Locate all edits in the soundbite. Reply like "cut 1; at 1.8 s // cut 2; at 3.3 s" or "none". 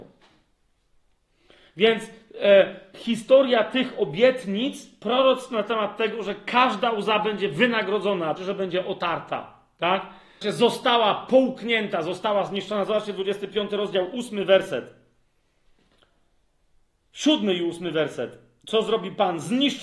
cut 1; at 8.4 s // cut 2; at 10.4 s

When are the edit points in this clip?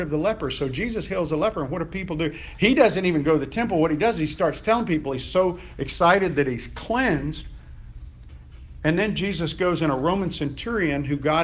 none

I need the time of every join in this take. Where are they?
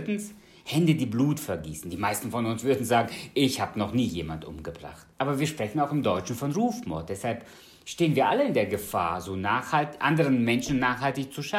cut 1; at 5.1 s

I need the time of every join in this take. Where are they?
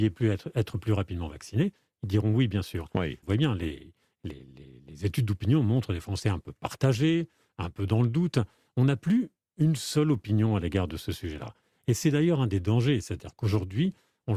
cut 1; at 3.2 s

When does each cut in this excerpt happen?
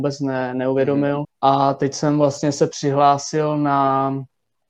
cut 1; at 1.2 s

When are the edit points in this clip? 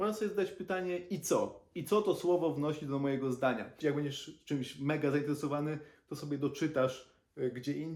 cut 1; at 3.8 s

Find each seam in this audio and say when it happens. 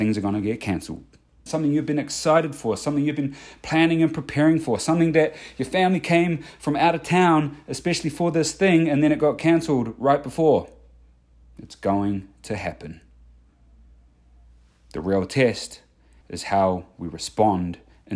cut 1; at 1.5 s // cut 2; at 16.2 s

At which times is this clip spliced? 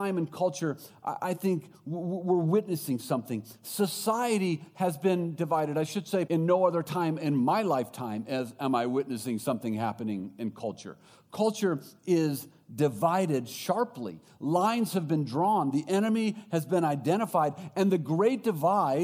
cut 1; at 6.3 s

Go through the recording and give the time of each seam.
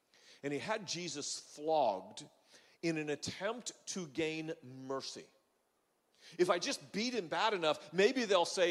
none

